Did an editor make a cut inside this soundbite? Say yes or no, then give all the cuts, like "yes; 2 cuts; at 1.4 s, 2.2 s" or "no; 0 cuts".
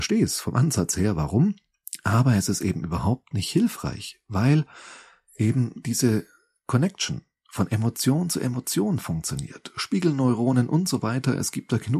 no; 0 cuts